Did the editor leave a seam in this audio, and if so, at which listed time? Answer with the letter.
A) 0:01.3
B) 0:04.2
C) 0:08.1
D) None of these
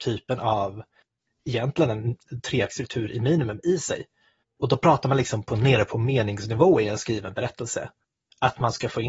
D